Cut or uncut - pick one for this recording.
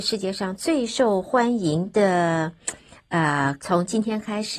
cut